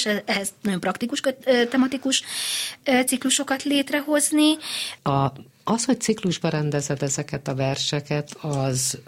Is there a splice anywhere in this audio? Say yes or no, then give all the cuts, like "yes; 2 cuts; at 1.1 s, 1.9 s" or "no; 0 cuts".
yes; 1 cut; at 5.0 s